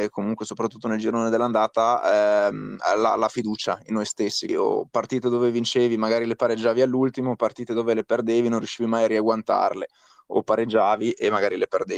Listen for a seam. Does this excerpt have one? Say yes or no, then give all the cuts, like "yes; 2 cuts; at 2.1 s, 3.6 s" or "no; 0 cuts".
yes; 1 cut; at 4.5 s